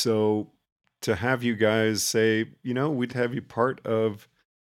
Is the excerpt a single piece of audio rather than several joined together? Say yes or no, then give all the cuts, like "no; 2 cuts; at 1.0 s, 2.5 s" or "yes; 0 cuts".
no; 1 cut; at 3.1 s